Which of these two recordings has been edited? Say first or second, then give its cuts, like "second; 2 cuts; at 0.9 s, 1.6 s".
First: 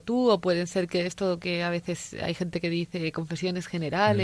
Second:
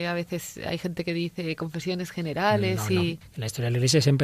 second; 1 cut; at 3.2 s